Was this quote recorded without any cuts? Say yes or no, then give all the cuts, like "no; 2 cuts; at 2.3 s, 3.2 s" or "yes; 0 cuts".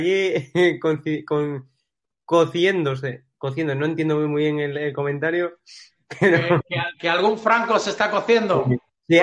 yes; 0 cuts